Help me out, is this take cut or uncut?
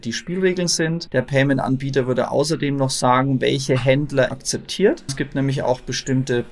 cut